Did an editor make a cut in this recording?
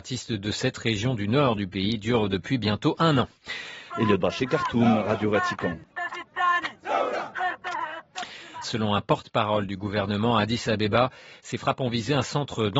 yes; 2 cuts; at 3.9 s, 8.6 s

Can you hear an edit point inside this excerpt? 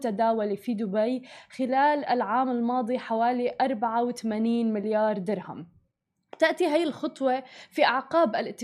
no; 0 cuts

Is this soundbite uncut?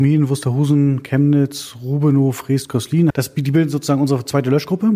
no; 1 cut; at 3.1 s

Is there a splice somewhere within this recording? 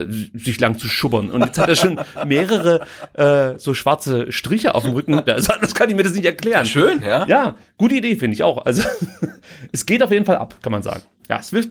yes; 1 cut; at 5.3 s

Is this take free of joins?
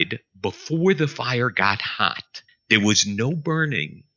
no; 1 cut; at 2.5 s

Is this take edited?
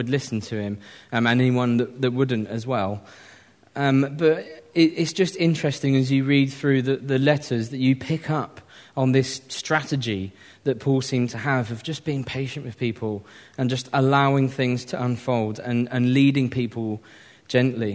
no; 0 cuts

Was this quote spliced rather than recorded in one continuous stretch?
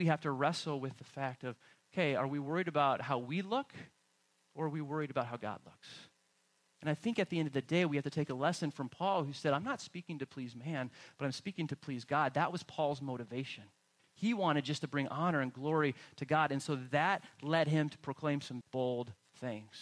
yes; 1 cut; at 18.6 s

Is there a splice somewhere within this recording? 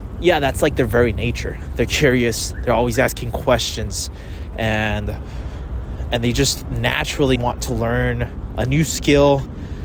yes; 1 cut; at 7.4 s

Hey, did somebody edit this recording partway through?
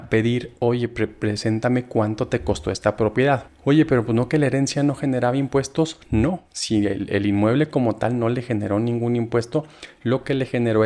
yes; 1 cut; at 3.5 s

